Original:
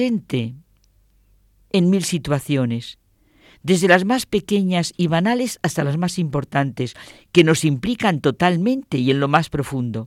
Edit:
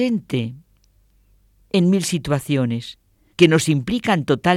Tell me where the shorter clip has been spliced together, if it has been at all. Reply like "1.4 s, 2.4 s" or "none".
3.3 s